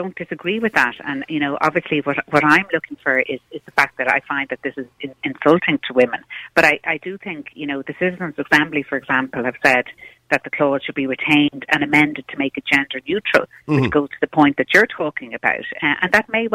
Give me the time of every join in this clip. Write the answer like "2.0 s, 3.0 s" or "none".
none